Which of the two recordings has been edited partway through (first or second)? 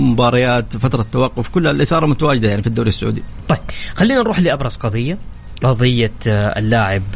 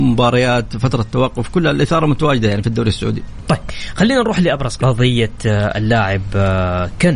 second